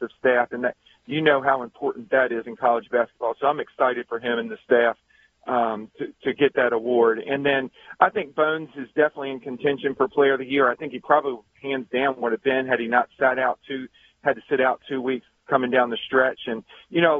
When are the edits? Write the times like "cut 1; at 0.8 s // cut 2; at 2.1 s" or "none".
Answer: none